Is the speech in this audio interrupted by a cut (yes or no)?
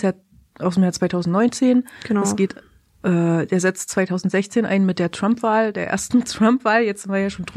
no